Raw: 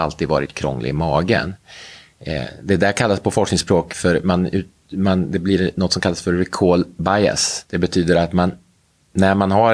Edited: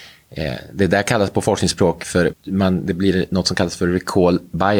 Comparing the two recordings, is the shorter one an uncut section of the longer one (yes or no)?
no